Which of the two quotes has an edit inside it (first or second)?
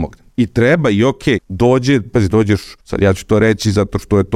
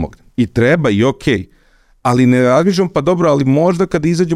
first